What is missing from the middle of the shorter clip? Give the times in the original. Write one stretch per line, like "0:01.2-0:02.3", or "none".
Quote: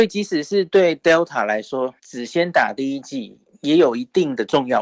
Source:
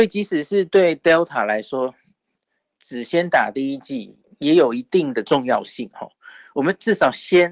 0:02.0-0:02.8